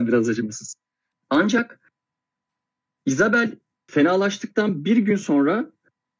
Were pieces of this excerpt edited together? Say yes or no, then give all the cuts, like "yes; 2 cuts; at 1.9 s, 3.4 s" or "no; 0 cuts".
yes; 1 cut; at 1.1 s